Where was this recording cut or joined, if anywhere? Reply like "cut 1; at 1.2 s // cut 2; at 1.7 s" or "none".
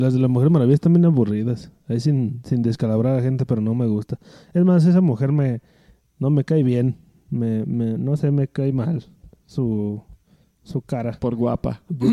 none